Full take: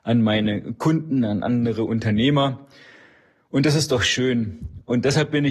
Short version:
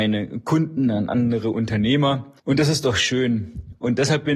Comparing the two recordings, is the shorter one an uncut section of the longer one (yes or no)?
no